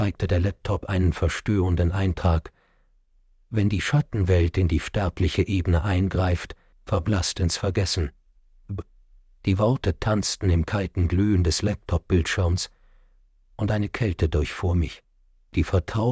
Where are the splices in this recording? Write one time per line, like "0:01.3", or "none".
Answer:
0:06.7